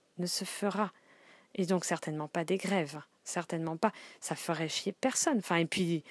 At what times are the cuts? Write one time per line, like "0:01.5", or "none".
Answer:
none